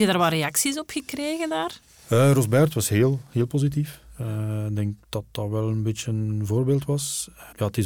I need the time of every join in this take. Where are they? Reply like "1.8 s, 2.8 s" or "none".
none